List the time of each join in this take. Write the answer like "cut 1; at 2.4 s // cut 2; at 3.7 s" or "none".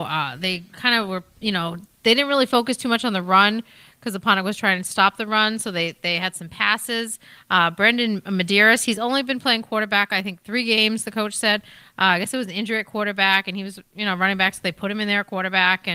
none